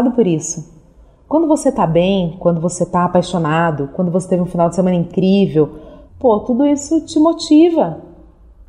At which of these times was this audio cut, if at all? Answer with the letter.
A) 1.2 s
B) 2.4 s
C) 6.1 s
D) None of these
C